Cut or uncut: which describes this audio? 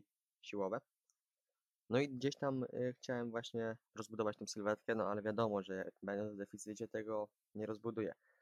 cut